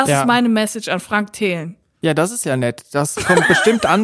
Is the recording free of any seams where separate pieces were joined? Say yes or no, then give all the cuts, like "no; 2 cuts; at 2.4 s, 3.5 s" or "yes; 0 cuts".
yes; 0 cuts